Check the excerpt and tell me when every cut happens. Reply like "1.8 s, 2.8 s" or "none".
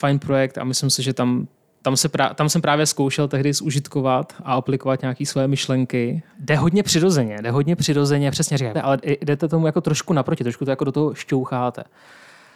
6.3 s, 8.7 s

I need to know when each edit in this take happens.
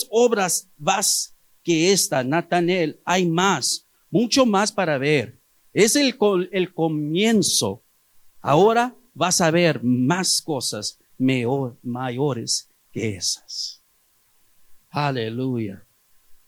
4.0 s

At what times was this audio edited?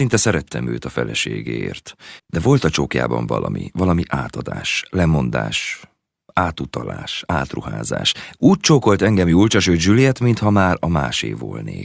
2.2 s

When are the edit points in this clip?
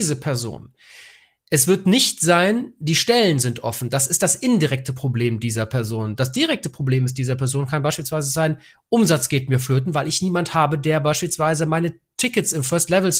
none

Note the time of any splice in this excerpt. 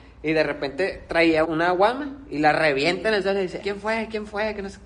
1.4 s, 3.6 s

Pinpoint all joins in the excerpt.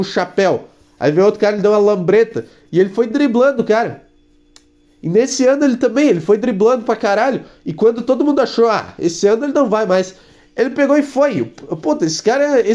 none

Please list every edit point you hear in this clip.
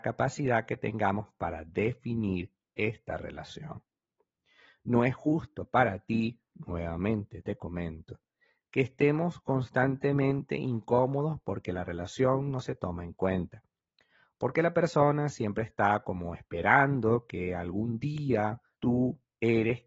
18.7 s

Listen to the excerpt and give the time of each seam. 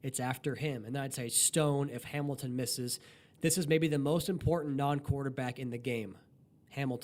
none

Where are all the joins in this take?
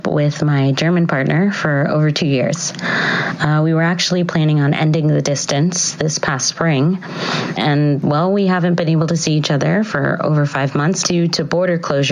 7.6 s, 11.0 s

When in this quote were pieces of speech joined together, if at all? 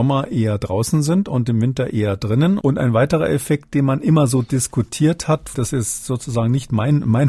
2.6 s, 5.5 s

